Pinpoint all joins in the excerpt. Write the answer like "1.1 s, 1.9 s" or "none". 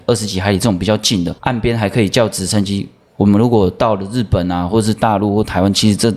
1.4 s